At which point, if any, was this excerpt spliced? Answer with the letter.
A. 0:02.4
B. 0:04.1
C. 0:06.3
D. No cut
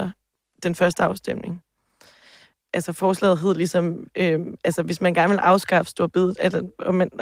D